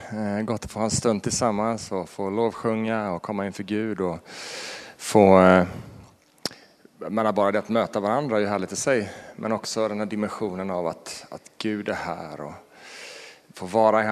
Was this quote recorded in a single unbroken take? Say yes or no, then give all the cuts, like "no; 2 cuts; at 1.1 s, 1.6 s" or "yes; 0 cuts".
yes; 0 cuts